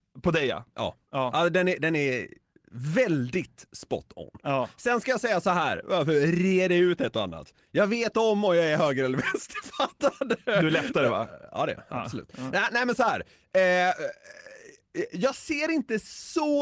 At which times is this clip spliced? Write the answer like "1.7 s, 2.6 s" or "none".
none